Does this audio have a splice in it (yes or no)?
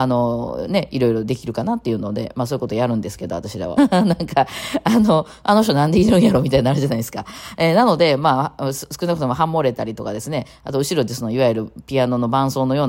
yes